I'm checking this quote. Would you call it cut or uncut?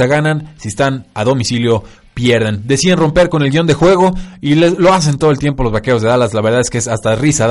uncut